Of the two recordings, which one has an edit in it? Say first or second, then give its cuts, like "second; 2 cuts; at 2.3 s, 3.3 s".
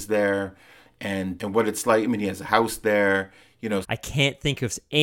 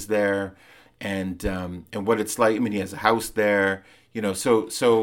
first; 2 cuts; at 1.4 s, 3.8 s